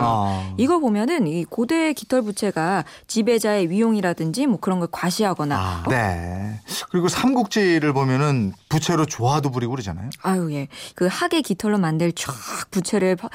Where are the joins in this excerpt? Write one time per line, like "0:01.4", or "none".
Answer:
0:05.9
0:10.9